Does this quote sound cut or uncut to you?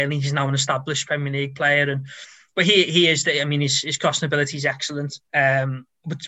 cut